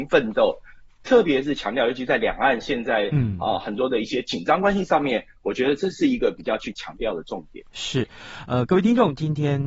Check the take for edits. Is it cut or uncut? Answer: uncut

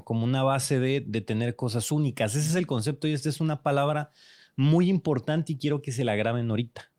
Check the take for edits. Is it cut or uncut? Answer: uncut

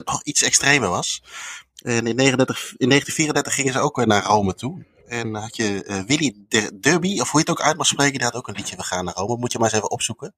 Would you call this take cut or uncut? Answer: uncut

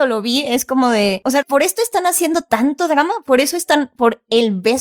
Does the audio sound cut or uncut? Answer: cut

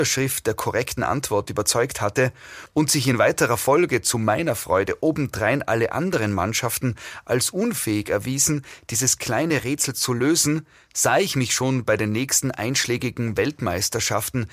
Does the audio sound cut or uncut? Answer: uncut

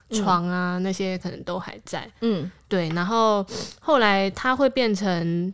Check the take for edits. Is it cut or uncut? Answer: uncut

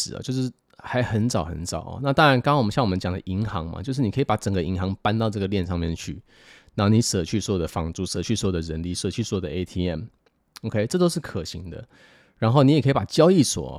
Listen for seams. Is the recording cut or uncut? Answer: uncut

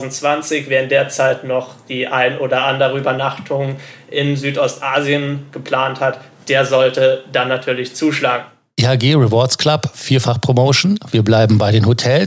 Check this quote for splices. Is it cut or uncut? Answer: uncut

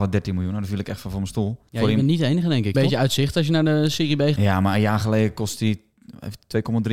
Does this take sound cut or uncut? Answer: cut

